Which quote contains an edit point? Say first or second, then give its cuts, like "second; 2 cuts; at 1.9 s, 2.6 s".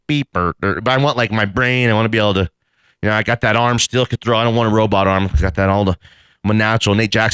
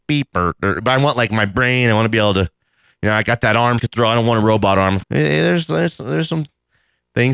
second; 2 cuts; at 3.8 s, 5.0 s